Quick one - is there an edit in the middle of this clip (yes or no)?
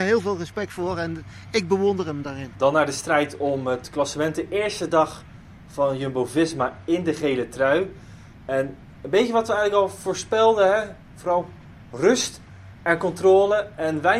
no